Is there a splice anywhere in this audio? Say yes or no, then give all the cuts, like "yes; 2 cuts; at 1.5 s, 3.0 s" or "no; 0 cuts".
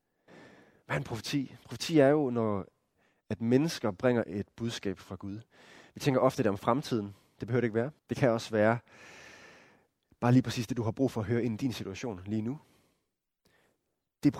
yes; 1 cut; at 8.0 s